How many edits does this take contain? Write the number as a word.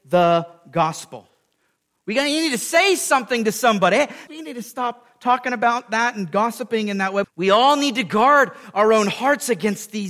two